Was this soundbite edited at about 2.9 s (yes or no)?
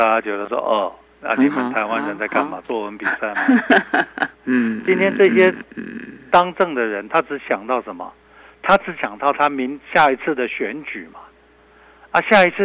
no